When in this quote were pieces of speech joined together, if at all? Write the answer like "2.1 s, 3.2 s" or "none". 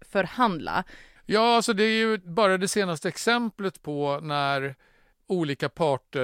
1.2 s